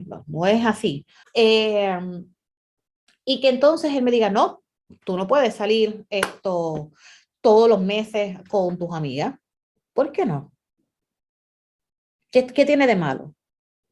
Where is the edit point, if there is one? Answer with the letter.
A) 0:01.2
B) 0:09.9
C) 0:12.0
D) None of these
A